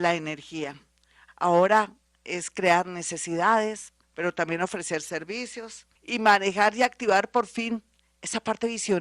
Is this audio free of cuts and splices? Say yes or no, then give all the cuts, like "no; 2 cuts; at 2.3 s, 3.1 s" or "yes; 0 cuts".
no; 3 cuts; at 1.3 s, 4.0 s, 6.0 s